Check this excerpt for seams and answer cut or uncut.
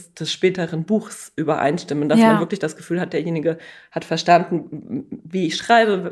uncut